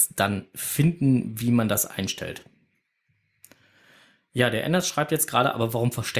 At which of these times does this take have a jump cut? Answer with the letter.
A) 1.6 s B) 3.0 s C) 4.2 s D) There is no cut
D